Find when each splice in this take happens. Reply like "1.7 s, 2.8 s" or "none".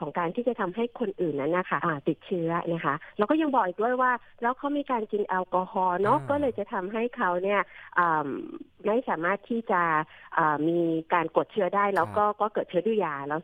1.8 s